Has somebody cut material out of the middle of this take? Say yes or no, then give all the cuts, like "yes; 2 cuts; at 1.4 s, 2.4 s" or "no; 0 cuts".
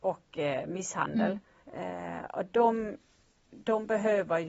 yes; 1 cut; at 1.6 s